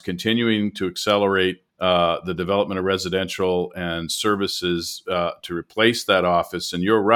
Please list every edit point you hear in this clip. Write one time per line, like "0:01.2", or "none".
0:01.7